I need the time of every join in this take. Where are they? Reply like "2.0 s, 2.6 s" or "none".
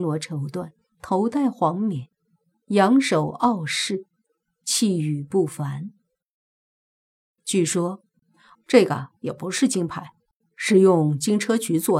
8.5 s